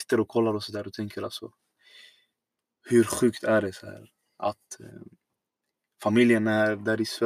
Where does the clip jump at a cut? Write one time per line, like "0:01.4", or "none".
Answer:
none